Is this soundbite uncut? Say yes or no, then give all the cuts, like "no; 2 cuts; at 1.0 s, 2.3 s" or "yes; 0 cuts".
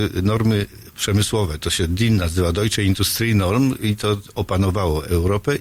yes; 0 cuts